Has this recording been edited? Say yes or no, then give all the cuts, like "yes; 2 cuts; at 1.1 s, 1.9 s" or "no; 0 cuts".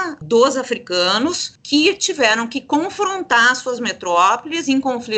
no; 0 cuts